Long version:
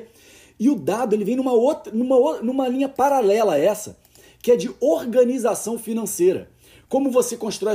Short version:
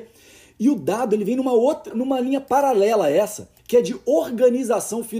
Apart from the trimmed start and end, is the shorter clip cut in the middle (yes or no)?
yes